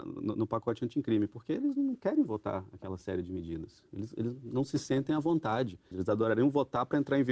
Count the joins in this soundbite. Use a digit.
1